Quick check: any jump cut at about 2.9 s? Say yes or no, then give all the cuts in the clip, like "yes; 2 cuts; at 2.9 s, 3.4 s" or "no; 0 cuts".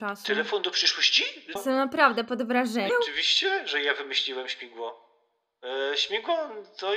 yes; 2 cuts; at 1.6 s, 2.9 s